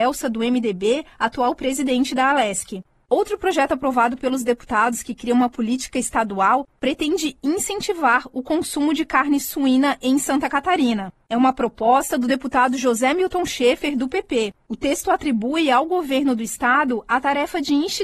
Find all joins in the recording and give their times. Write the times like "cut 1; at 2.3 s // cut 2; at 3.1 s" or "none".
none